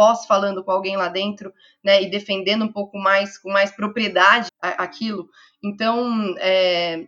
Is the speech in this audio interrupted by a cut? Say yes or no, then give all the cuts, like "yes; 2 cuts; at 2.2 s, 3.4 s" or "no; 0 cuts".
yes; 1 cut; at 4.5 s